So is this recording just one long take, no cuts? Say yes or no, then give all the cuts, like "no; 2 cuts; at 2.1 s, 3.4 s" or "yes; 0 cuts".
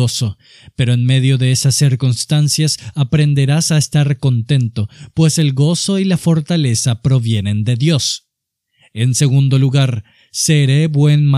yes; 0 cuts